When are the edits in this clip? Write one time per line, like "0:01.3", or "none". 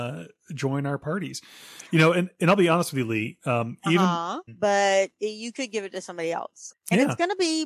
0:04.5
0:06.7